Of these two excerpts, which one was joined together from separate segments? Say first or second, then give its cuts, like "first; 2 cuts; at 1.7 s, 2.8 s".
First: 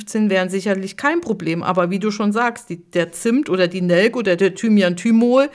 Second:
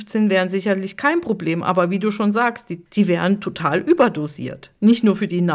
second; 1 cut; at 2.9 s